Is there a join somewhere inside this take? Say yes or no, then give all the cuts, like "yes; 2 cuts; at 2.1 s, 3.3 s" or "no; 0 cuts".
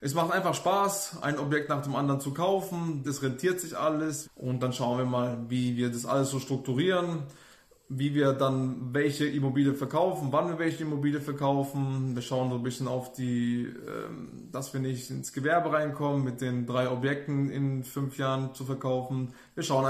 yes; 2 cuts; at 3.0 s, 4.2 s